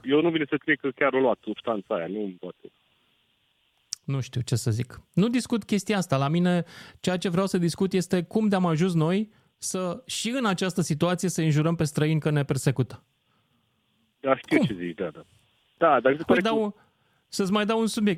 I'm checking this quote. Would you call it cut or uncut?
cut